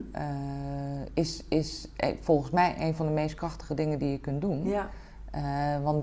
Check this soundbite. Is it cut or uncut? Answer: uncut